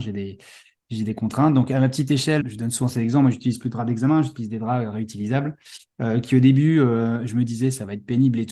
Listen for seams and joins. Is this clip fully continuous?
no; 1 cut; at 2.4 s

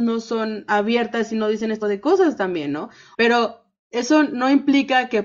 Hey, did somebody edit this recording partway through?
yes; 2 cuts; at 1.8 s, 3.1 s

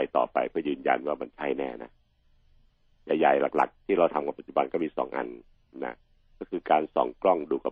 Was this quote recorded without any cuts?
yes; 0 cuts

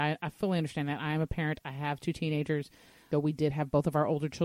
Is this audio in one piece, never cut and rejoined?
no; 1 cut; at 3.1 s

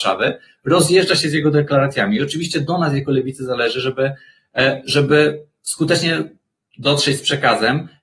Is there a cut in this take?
no; 0 cuts

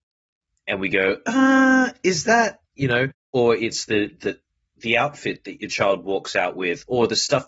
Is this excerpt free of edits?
yes; 0 cuts

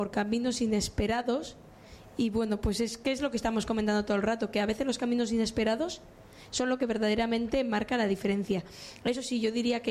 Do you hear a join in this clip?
no; 0 cuts

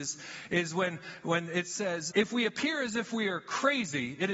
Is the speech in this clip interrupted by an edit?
yes; 1 cut; at 2.1 s

